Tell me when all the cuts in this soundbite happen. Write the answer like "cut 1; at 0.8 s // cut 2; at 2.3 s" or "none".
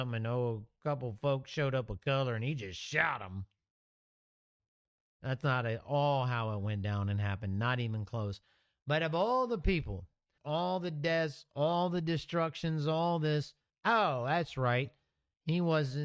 cut 1; at 10.4 s // cut 2; at 13.7 s